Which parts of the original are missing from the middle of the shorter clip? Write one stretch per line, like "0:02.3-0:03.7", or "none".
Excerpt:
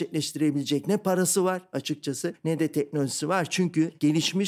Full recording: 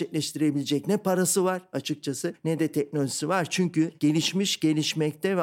none